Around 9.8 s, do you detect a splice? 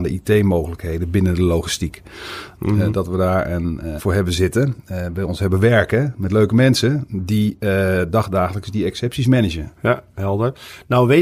yes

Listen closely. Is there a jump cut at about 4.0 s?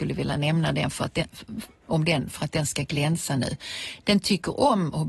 no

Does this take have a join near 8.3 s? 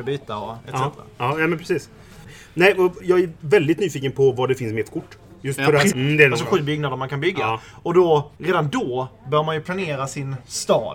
yes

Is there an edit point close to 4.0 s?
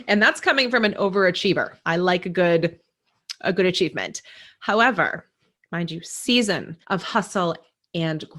no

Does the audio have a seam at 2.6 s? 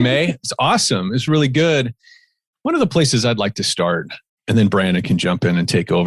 no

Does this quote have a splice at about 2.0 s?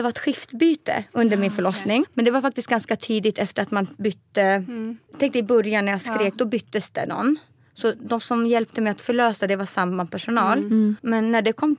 yes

